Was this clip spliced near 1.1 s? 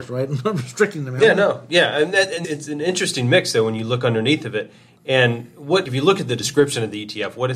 no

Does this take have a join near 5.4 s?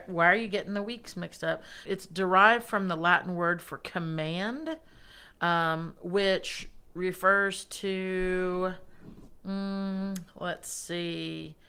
no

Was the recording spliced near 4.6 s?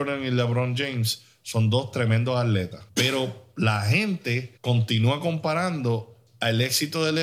yes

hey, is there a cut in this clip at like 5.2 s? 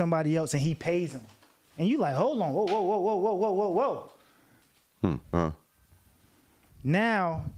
yes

